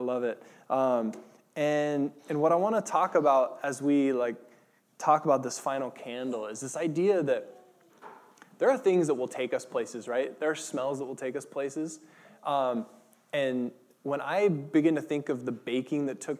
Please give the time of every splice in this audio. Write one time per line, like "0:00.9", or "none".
none